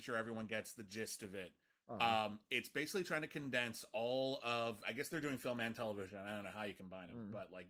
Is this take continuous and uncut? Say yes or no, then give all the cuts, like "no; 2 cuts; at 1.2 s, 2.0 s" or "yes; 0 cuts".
yes; 0 cuts